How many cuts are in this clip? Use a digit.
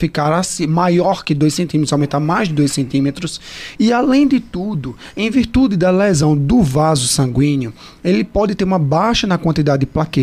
1